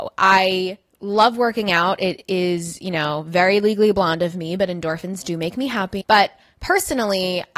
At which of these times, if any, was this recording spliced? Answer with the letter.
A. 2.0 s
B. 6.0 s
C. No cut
B